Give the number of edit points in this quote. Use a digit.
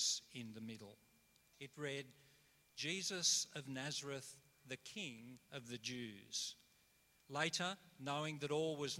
2